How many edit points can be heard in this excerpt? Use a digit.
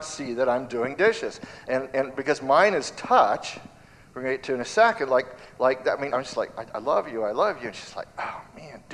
1